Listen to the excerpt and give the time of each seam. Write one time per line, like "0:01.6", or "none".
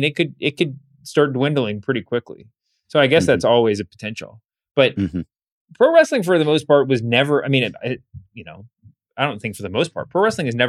0:05.5

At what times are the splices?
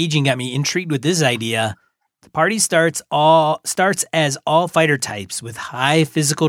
0:02.1

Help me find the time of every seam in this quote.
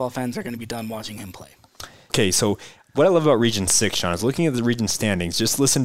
0:02.1

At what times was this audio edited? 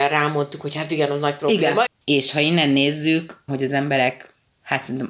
0:01.9
0:03.5

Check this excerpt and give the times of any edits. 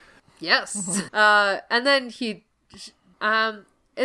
0:01.1
0:03.1

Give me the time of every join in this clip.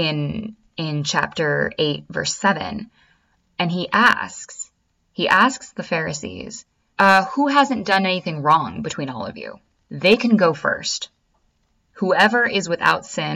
0:06.9

